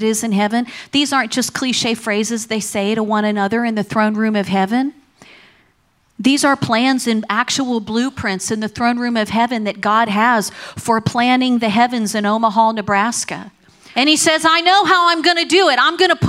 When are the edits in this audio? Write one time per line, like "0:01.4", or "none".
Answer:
0:13.9